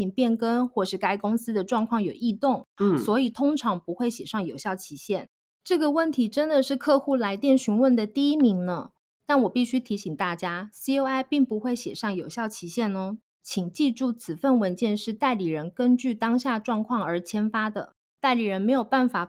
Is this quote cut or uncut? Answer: cut